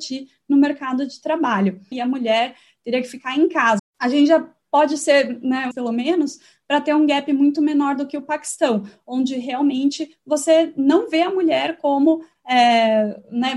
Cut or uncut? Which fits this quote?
cut